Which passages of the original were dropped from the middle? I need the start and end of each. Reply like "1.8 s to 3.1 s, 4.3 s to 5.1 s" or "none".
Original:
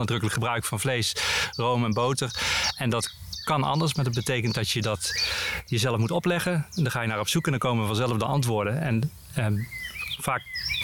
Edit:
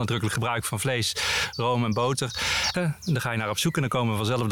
2.7 s to 6.4 s